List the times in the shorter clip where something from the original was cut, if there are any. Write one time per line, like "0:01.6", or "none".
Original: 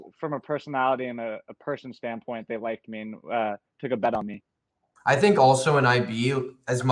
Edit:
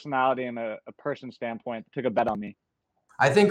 0:01.8